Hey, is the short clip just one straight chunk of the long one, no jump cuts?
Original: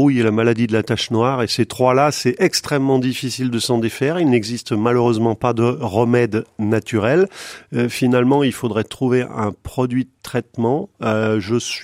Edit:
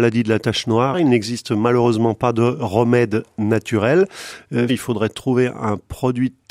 no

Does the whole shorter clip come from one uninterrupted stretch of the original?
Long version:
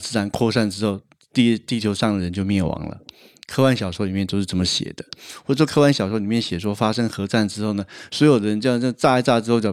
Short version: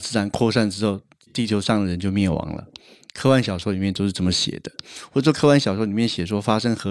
no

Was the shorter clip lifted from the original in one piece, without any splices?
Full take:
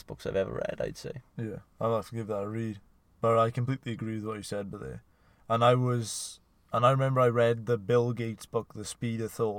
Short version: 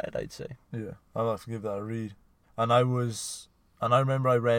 no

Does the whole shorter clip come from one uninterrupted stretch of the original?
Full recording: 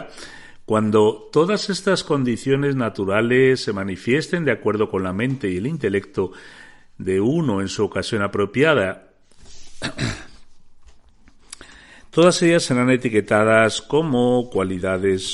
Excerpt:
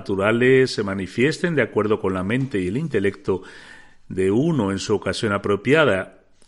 yes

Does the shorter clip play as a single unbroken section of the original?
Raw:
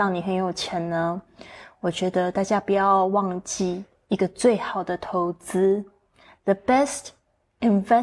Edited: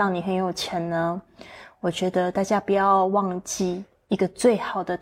yes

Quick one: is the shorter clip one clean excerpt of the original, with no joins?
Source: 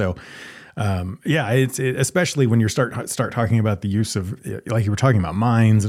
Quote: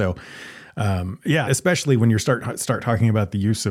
no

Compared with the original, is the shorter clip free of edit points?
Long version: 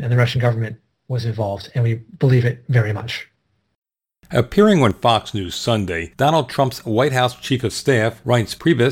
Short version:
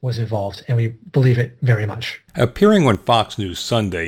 no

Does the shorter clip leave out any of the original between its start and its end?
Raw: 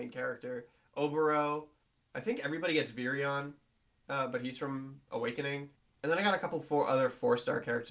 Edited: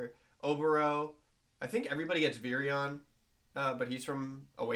no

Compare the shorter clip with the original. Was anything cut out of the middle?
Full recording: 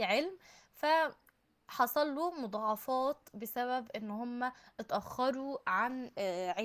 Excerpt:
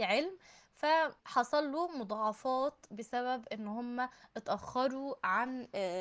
yes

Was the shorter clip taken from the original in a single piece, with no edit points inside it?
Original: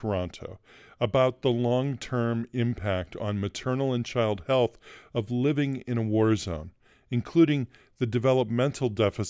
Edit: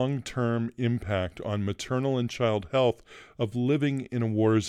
yes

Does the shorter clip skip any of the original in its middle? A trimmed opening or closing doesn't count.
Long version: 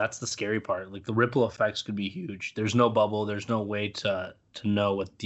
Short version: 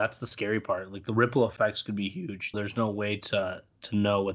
yes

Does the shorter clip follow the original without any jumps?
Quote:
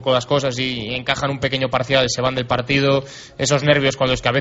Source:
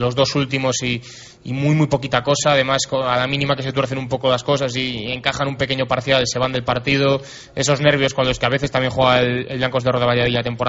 yes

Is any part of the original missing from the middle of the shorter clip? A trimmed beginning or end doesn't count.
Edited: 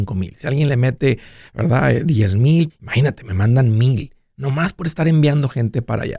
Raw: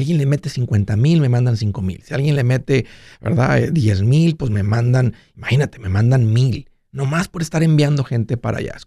yes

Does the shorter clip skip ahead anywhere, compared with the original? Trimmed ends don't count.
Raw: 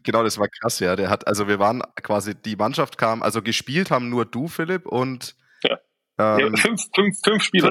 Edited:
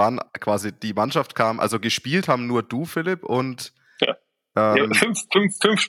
no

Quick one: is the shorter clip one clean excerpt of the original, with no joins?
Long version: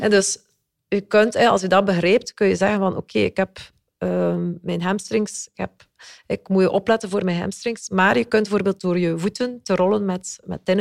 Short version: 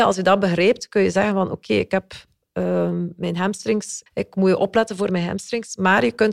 no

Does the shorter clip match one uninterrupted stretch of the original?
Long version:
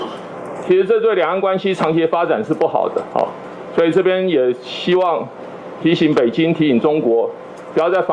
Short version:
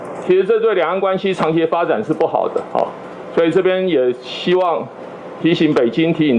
yes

